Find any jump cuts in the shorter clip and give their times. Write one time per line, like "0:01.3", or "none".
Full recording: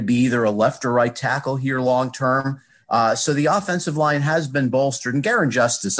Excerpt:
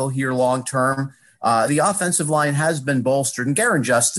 0:01.7